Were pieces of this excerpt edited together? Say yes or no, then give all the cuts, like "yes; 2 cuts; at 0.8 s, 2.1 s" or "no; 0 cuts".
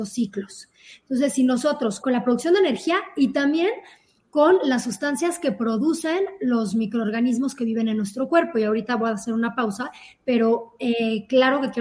yes; 1 cut; at 2.0 s